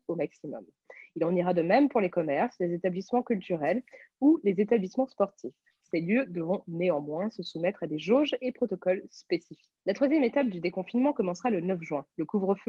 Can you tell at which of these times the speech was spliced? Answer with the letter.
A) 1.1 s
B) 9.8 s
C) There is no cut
C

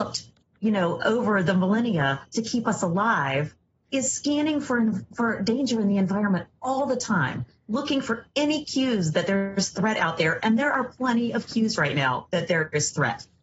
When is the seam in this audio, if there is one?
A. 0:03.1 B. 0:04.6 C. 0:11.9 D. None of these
D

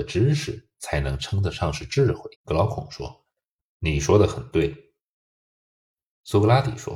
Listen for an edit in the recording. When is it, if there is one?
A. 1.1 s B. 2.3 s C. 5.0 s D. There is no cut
B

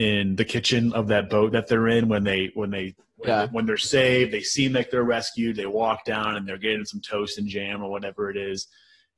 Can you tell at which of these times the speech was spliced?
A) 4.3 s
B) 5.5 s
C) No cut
C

